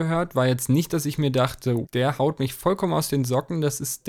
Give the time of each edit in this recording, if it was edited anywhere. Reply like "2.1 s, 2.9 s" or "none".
1.9 s